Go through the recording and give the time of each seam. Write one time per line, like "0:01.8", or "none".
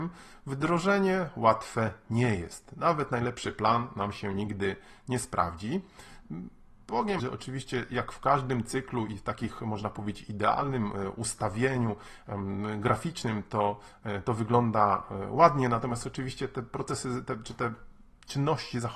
0:07.2